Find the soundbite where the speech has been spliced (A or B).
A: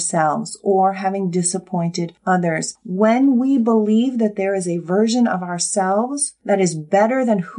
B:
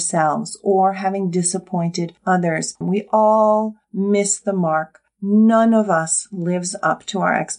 B